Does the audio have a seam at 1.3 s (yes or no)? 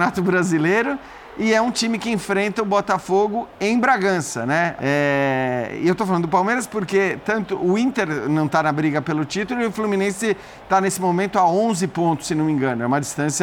no